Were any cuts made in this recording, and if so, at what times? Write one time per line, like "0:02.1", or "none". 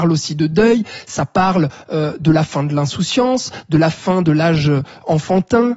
none

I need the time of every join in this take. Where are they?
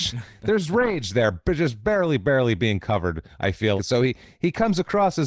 0:03.8

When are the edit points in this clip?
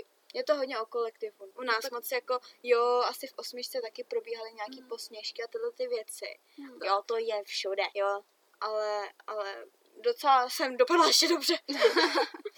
0:01.5
0:06.8
0:07.9

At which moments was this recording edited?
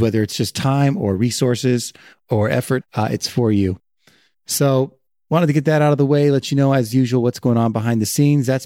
0:02.8

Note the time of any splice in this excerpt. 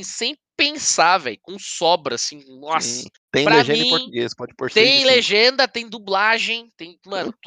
0:03.1

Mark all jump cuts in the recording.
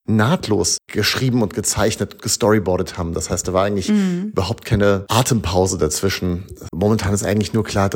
0:06.7

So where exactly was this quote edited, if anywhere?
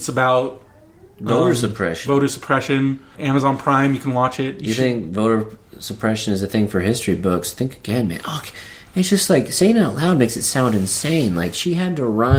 0:03.1

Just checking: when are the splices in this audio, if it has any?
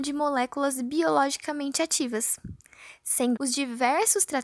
0:03.4

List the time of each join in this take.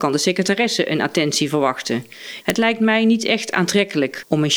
0:02.4

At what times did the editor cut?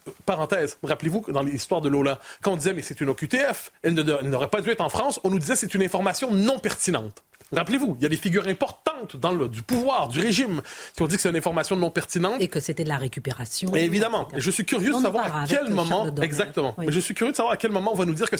none

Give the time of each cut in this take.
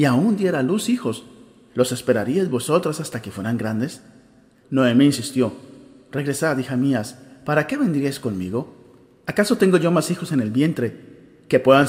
0:04.6

